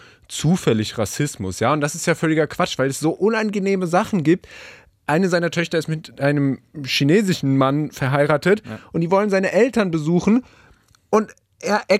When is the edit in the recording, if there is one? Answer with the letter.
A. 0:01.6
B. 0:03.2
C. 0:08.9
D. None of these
D